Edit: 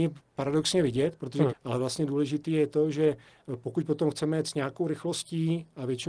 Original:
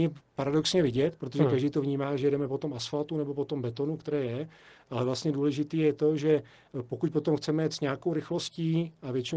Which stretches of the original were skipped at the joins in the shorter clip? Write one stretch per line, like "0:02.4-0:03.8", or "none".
0:01.5-0:04.8